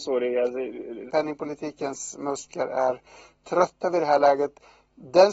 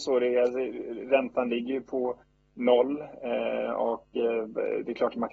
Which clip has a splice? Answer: first; 1 cut; at 1.1 s

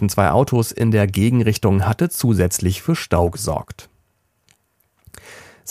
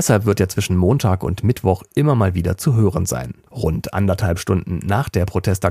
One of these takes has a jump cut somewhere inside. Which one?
second; 1 cut; at 3.5 s

